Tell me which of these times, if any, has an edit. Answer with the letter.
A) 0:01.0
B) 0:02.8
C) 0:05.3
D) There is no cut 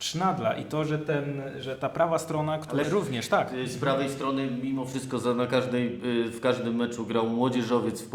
B